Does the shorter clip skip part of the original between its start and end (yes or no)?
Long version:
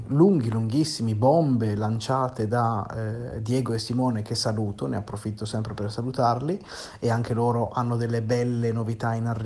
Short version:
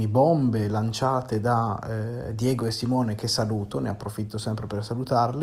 no